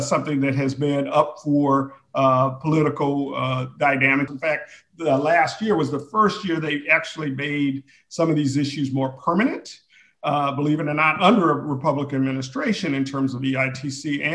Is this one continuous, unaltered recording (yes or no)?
no